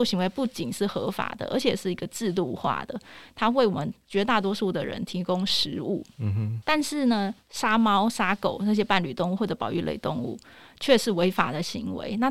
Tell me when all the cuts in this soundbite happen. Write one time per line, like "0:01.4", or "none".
none